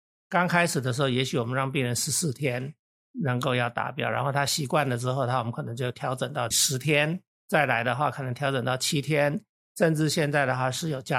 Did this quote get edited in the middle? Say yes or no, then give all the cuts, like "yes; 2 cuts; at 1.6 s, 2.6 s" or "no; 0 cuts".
no; 0 cuts